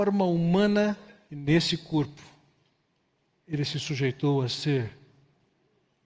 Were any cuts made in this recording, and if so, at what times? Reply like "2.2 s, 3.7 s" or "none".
1.3 s